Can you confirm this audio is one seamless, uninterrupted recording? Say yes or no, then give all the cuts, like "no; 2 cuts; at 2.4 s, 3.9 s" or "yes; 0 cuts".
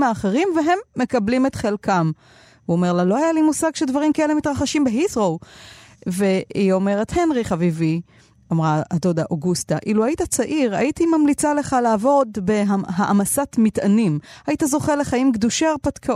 yes; 0 cuts